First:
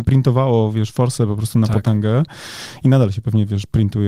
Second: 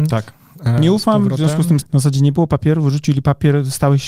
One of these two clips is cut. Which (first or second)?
second